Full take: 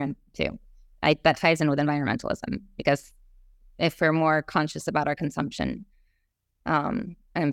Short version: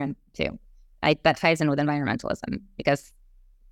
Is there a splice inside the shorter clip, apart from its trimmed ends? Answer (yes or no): no